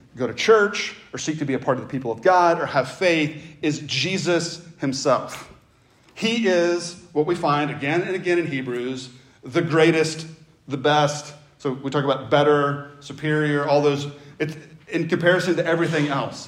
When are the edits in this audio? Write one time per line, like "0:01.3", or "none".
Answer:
none